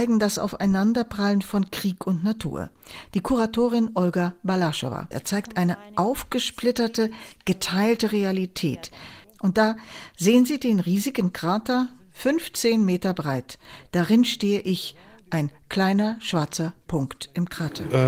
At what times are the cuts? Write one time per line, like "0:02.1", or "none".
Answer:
0:05.1
0:09.2